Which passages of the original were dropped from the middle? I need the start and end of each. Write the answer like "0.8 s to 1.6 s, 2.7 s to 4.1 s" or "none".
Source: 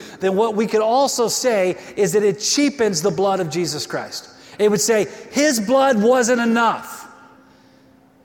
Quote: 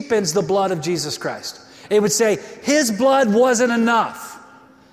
none